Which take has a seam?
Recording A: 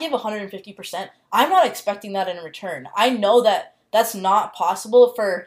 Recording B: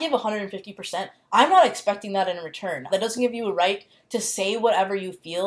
B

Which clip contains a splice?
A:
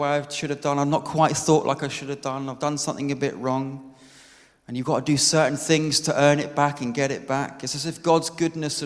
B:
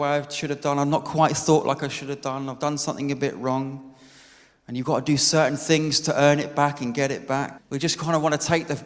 B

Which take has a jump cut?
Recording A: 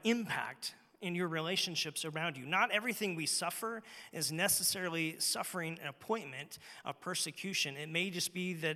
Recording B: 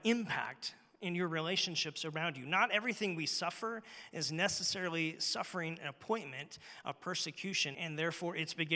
B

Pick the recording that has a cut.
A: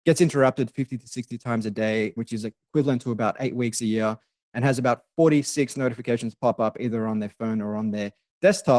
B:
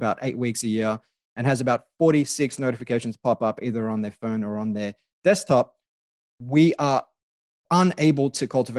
A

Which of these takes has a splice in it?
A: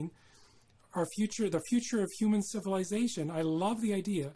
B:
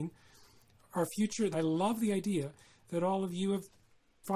B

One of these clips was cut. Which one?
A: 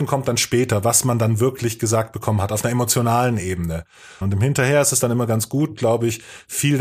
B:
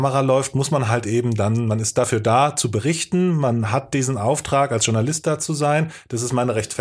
A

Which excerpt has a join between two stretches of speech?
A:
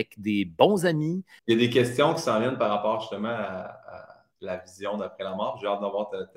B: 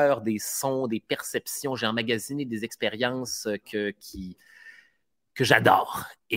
A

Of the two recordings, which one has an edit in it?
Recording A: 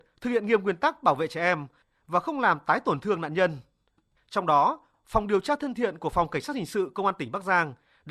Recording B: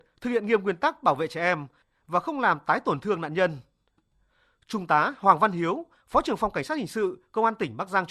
A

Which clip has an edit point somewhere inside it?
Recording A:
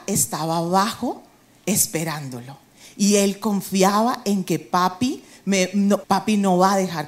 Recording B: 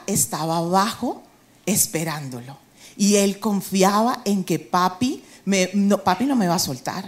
A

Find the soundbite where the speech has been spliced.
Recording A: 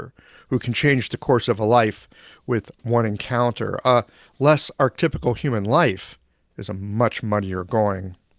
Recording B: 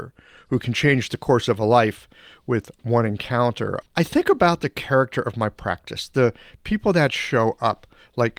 B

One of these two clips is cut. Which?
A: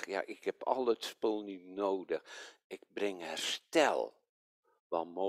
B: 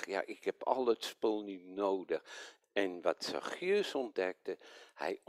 B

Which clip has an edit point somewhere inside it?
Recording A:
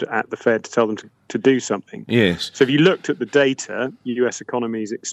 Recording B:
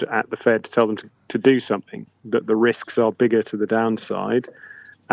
B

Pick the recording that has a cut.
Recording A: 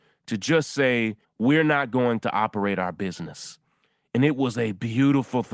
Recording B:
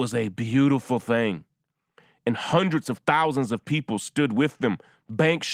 A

